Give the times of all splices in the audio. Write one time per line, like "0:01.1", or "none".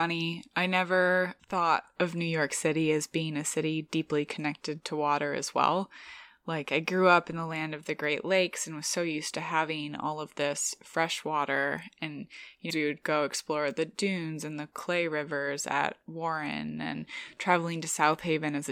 0:12.7

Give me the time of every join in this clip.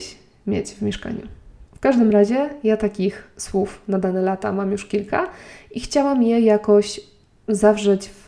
0:01.6

